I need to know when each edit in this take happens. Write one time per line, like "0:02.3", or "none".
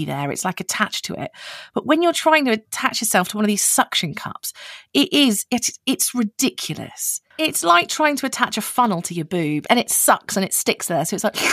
none